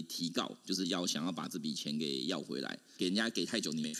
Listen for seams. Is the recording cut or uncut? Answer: cut